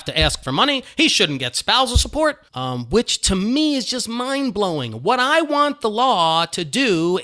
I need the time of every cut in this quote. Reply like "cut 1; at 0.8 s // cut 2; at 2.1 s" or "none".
cut 1; at 2.5 s